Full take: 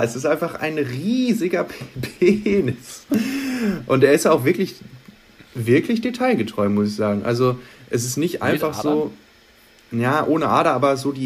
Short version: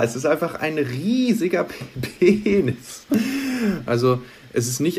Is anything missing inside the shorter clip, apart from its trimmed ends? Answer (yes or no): yes